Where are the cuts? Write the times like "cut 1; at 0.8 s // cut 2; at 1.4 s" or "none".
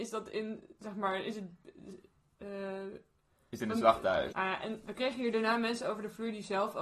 cut 1; at 4.3 s